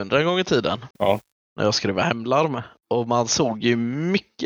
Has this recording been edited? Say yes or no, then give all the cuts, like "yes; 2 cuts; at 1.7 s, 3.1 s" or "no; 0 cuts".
yes; 1 cut; at 0.9 s